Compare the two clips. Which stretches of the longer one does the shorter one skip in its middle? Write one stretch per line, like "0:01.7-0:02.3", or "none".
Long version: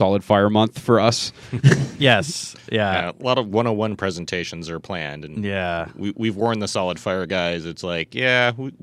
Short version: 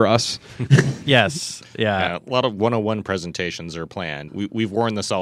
0:05.2-0:05.9

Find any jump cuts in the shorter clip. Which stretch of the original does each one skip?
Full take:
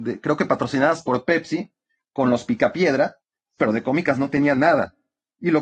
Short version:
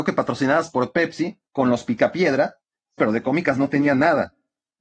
0:01.8-0:02.1

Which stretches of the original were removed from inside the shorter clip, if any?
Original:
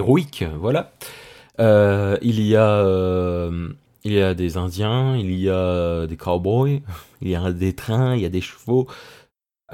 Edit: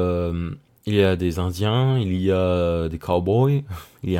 none

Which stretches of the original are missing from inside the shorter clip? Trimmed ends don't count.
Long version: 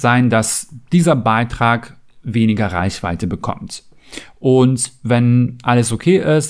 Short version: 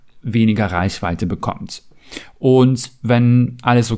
none

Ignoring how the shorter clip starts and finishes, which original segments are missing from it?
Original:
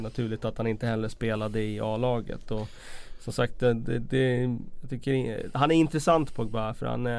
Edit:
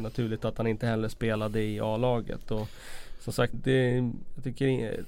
0:03.5-0:04.0

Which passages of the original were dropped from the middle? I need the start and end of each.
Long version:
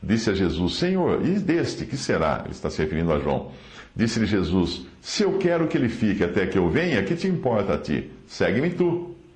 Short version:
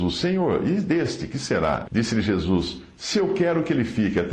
0:02.4-0:03.9

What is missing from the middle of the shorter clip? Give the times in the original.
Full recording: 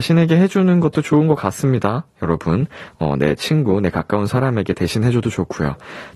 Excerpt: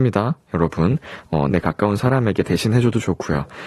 0:03.2-0:03.8

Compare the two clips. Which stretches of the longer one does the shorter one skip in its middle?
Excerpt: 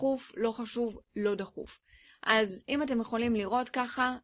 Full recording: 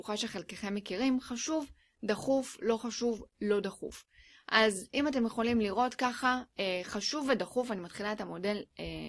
none

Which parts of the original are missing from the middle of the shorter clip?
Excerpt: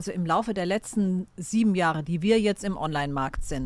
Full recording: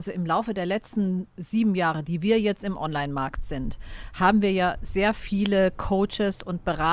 none

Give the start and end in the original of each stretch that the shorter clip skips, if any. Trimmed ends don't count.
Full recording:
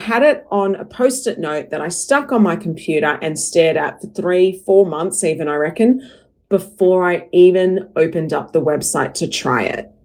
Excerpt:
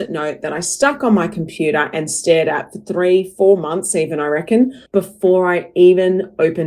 0:06.1-0:06.4

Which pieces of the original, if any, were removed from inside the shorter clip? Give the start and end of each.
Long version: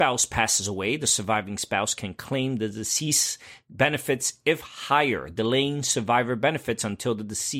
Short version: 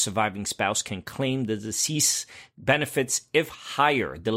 none

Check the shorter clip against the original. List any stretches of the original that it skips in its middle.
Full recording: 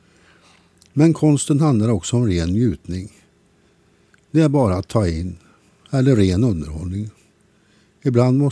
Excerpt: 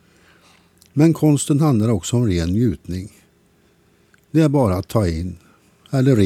none

